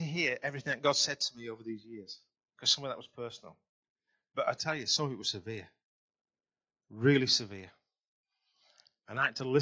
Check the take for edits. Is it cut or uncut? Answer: uncut